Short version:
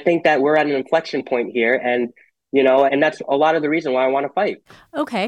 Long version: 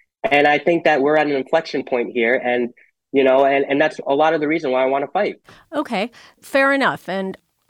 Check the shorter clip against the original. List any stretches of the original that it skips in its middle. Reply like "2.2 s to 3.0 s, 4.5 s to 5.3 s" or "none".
3.5 s to 3.7 s